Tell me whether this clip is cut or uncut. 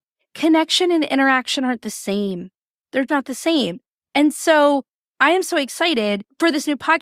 cut